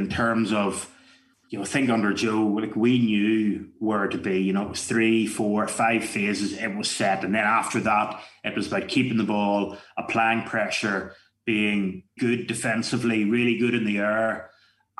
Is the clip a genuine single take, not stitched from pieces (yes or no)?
no